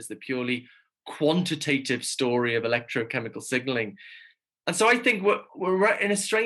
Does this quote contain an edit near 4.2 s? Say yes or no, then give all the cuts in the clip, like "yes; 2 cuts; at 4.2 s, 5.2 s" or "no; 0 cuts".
no; 1 cut; at 5.5 s